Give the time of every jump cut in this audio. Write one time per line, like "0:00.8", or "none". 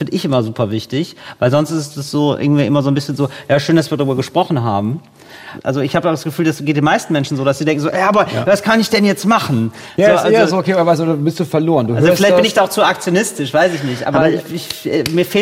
none